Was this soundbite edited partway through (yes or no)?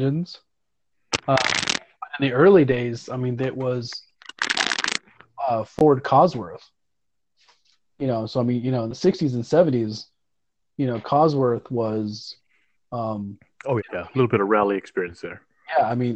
yes